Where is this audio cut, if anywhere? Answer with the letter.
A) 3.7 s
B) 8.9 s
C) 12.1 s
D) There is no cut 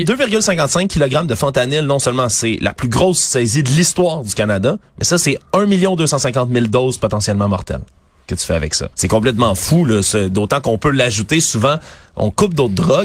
B